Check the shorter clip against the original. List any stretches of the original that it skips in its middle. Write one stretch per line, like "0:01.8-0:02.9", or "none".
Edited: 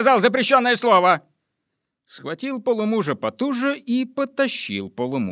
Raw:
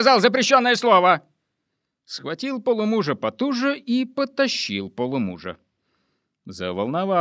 none